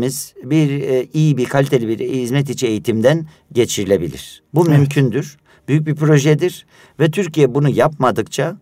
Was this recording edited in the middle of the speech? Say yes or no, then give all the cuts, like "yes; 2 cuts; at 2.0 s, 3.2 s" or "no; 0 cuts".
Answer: no; 0 cuts